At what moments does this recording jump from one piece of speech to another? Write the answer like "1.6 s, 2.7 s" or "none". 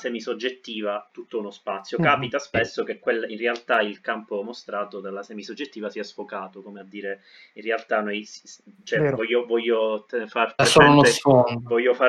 none